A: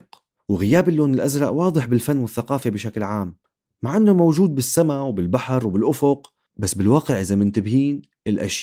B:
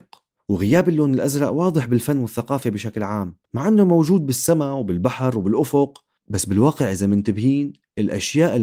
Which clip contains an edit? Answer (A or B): B